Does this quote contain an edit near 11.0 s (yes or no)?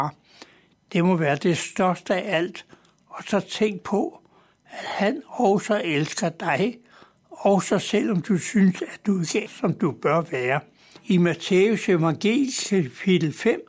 yes